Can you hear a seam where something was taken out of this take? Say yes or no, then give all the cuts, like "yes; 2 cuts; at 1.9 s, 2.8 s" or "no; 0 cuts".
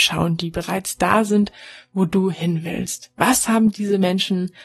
no; 0 cuts